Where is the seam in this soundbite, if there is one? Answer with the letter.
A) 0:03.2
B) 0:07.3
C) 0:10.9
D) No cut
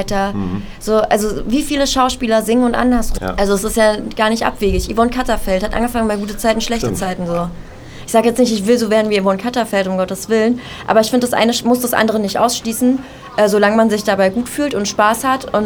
A